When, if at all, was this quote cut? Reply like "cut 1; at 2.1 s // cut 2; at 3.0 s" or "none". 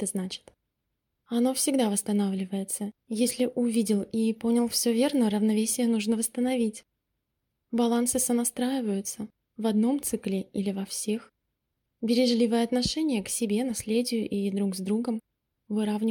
cut 1; at 1.2 s